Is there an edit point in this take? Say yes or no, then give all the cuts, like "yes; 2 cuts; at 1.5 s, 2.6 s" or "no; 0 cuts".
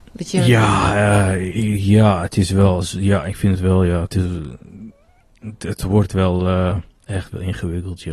no; 0 cuts